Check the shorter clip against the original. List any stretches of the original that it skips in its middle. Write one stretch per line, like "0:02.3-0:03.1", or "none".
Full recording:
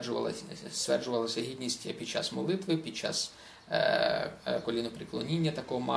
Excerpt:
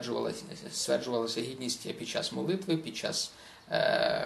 none